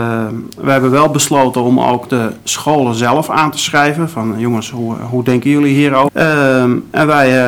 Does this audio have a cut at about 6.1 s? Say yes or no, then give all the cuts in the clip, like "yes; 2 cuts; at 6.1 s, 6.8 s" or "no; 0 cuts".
yes; 1 cut; at 6.1 s